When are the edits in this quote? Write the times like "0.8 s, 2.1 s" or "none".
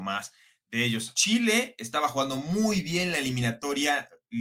1.1 s